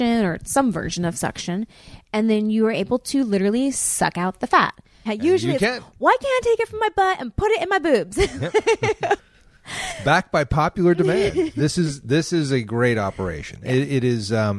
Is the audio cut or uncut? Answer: cut